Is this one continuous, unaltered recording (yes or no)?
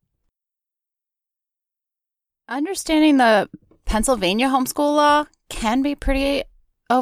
yes